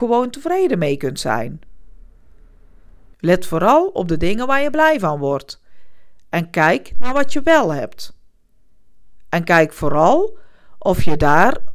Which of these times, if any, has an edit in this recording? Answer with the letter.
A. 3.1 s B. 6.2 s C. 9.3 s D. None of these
A